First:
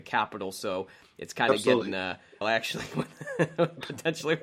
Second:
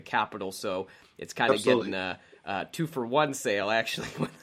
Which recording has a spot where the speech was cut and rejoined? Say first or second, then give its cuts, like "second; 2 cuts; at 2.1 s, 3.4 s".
first; 1 cut; at 2.4 s